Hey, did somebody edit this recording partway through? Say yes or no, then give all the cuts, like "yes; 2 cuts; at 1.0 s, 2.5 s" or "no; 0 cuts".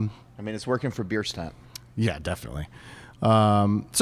no; 0 cuts